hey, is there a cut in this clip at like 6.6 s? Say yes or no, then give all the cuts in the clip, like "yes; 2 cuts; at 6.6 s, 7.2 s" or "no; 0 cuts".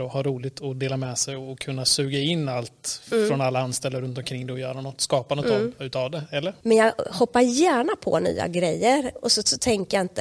yes; 1 cut; at 6.6 s